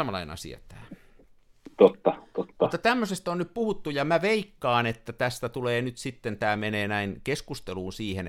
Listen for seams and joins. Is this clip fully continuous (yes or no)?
yes